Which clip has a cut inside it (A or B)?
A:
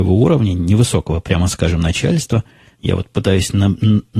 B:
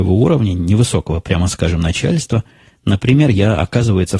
A